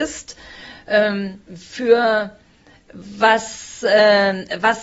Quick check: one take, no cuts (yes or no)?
no